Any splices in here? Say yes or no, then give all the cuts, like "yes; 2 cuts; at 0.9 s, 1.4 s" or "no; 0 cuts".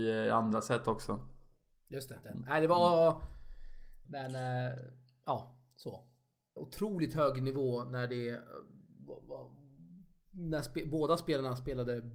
yes; 3 cuts; at 2.2 s, 4.0 s, 6.6 s